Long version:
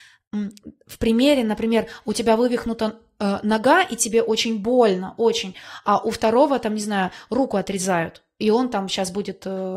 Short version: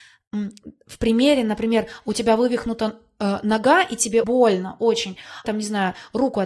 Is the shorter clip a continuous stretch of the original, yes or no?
no